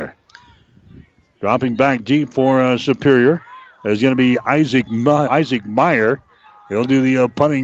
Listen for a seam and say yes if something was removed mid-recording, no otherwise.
yes